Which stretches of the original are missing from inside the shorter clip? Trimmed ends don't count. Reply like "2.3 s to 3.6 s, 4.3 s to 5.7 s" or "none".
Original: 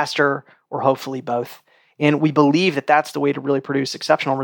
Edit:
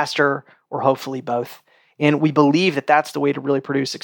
none

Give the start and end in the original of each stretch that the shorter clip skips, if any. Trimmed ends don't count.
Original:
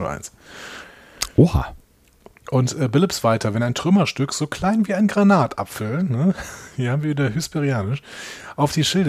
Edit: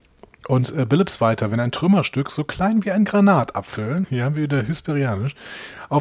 6.1 s to 6.7 s

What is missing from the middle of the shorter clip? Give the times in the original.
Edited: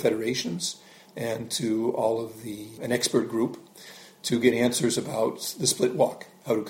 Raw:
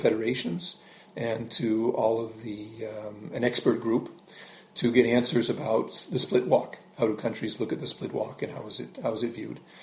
2.8 s to 3.3 s

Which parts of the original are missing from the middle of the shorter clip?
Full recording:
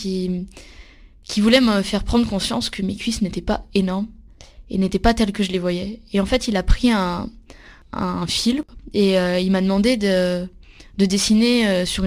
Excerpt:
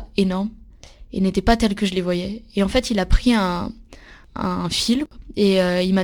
none

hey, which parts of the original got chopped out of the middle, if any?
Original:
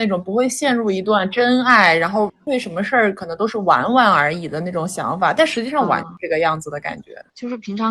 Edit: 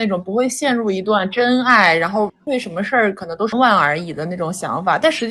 3.5 s to 3.9 s

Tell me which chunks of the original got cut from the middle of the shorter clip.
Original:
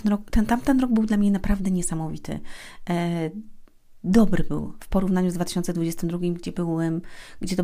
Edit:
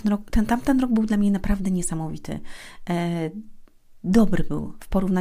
none

